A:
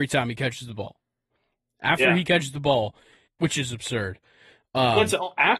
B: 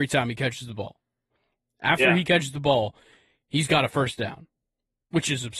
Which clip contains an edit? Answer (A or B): A